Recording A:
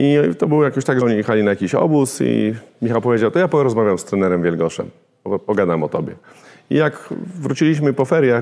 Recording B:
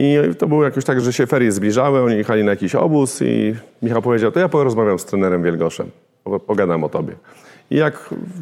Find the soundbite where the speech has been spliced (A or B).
A